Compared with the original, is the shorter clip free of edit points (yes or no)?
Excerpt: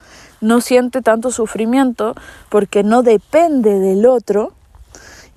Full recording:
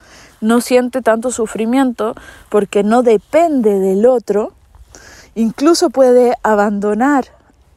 yes